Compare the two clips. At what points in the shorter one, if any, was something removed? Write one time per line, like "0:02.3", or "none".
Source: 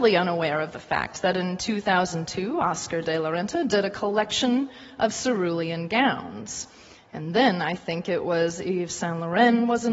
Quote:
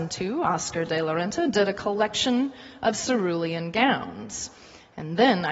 none